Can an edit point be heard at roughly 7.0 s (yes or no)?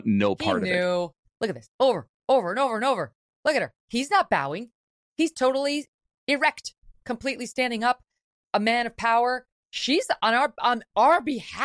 no